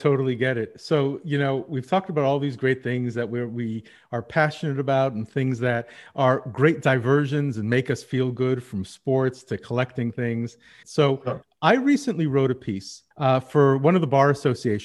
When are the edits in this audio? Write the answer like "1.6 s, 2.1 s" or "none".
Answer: 10.8 s, 13.1 s